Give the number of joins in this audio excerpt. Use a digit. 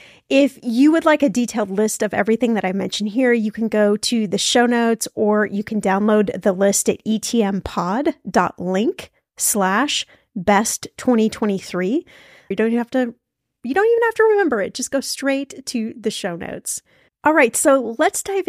1